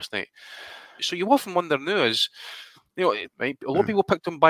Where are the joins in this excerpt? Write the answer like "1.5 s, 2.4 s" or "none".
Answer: 1.0 s, 3.3 s